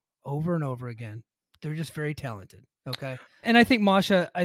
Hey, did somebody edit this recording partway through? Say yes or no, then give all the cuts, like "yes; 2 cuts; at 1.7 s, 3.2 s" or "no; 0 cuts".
yes; 1 cut; at 3.4 s